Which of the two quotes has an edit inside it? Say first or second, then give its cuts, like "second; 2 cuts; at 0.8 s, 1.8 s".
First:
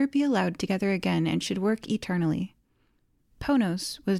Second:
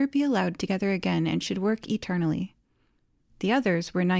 second; 1 cut; at 3.3 s